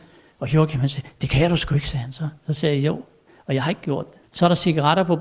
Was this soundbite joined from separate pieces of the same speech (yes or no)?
yes